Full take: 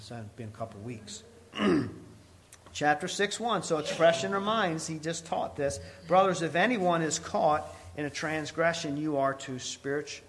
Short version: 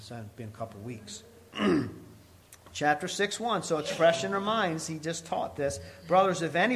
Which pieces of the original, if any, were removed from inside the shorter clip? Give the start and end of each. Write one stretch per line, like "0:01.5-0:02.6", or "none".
none